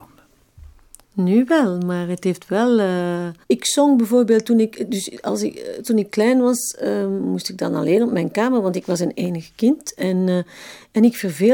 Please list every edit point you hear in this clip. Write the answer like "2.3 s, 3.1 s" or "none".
1.0 s, 3.4 s, 5.8 s